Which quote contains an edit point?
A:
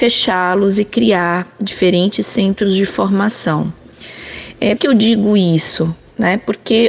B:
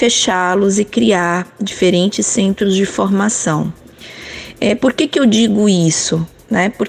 A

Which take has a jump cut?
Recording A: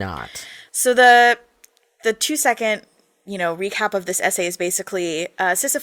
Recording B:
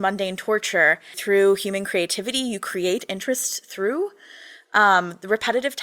B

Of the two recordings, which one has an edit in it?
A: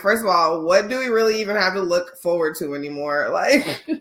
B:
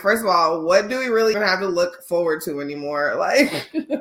B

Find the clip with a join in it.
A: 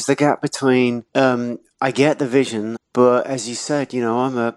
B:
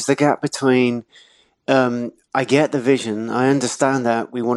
A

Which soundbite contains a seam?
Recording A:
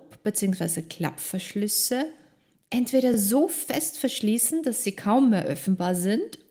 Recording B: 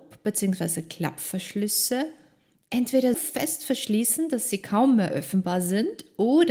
B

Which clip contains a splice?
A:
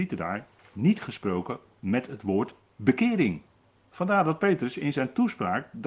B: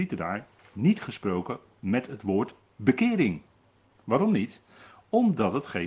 A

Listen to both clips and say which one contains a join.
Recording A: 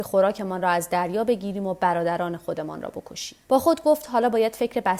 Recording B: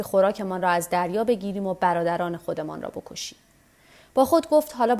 A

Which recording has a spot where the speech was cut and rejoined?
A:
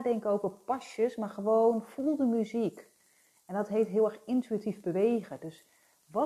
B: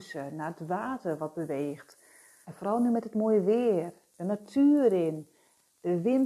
B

